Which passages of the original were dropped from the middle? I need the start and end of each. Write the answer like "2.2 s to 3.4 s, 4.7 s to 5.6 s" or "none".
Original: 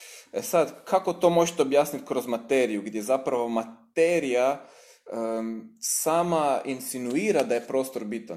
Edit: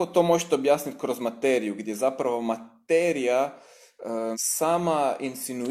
5.4 s to 5.8 s